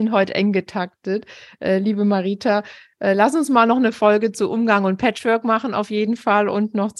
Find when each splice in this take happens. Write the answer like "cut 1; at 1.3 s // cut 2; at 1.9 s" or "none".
none